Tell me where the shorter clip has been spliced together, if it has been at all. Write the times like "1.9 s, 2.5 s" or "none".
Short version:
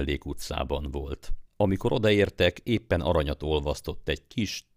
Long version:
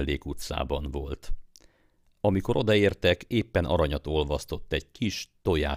1.5 s